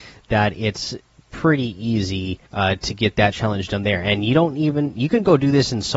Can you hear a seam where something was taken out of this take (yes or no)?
yes